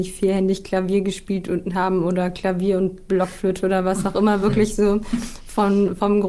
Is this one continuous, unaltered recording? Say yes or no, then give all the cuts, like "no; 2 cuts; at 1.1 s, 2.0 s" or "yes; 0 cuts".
yes; 0 cuts